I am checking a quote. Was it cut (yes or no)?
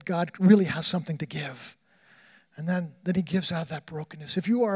no